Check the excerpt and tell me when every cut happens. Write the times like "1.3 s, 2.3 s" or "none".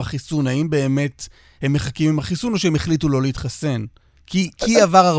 none